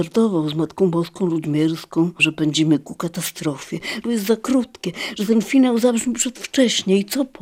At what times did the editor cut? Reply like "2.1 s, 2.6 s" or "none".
2.2 s, 4.0 s